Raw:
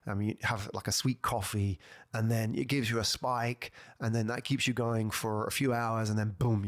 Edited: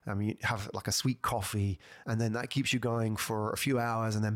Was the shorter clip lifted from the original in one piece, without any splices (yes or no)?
no